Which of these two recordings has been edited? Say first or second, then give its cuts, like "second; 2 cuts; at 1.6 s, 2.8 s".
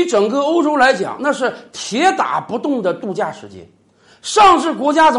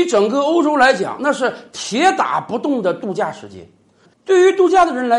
second; 1 cut; at 4.0 s